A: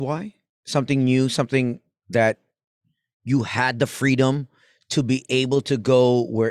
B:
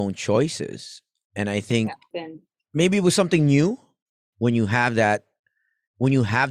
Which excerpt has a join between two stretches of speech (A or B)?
B